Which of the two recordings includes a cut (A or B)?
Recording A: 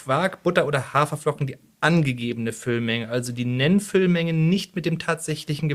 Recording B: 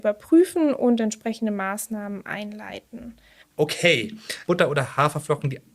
B